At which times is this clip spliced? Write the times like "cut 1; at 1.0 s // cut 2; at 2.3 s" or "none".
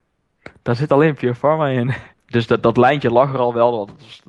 cut 1; at 2.1 s